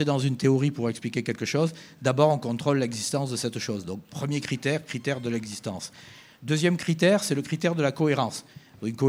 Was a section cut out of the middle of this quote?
no; 0 cuts

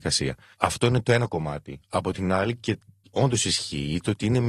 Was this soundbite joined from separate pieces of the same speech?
no; 0 cuts

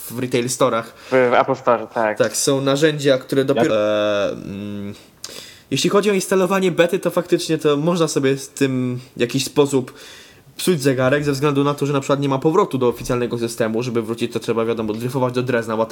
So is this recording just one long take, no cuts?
no; 1 cut; at 3.7 s

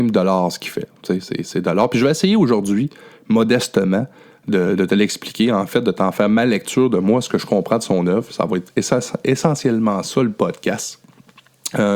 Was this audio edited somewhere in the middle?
no; 0 cuts

